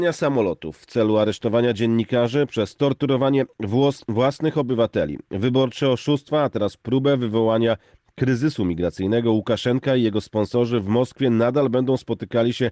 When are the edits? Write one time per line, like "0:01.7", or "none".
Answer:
none

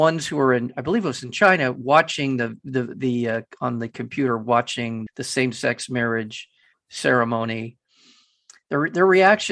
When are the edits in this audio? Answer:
0:05.1

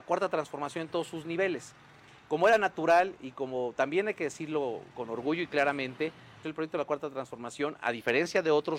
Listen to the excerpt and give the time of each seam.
0:06.4

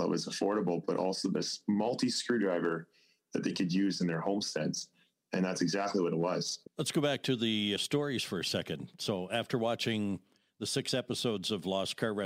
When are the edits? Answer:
0:06.6

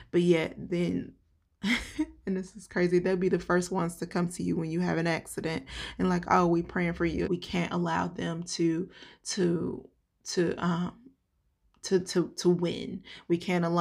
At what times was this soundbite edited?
0:07.3

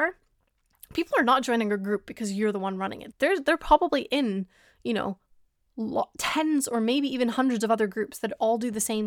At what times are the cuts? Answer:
0:03.1

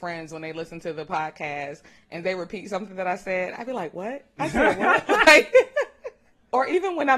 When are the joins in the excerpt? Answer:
none

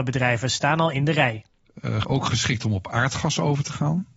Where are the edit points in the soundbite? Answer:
0:02.0

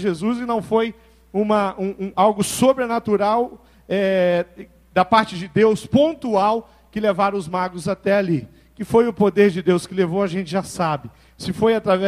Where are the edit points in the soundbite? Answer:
0:02.1

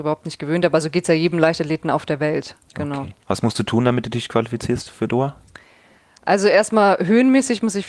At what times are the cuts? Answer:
0:03.2

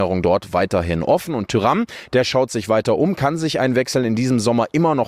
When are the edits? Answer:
none

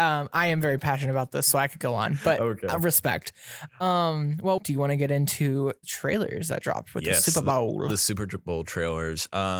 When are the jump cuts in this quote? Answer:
0:04.6

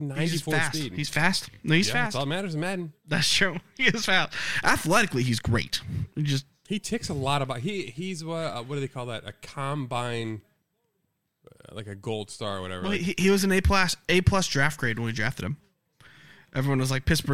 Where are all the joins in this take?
none

